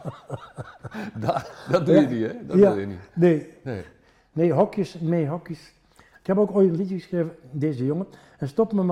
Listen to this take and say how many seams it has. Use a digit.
0